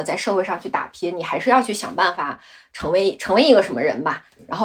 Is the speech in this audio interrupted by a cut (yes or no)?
no